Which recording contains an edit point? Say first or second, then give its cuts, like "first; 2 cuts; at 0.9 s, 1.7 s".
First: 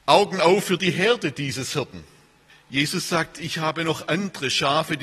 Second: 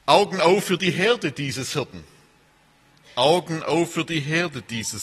first; 1 cut; at 2.5 s